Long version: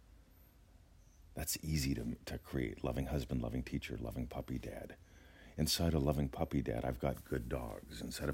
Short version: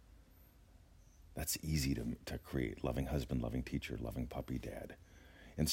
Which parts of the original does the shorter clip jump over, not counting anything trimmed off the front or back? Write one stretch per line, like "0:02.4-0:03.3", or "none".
none